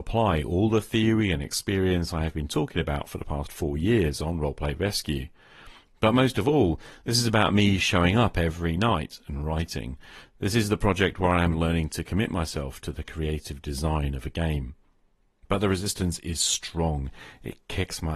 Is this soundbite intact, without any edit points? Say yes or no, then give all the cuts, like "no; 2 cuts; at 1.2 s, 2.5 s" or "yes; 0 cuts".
yes; 0 cuts